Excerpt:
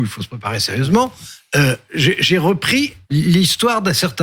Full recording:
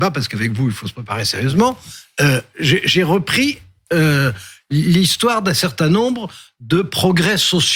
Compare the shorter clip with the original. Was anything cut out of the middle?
yes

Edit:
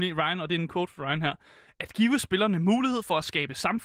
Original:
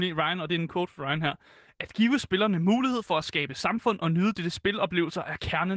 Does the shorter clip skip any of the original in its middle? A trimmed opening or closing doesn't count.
no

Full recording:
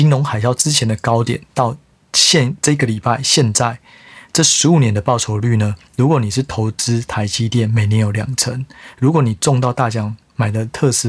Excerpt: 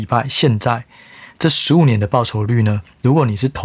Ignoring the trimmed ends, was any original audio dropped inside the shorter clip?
no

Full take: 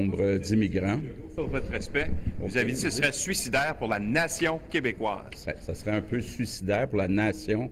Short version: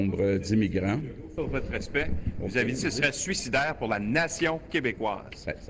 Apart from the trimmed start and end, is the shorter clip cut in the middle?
no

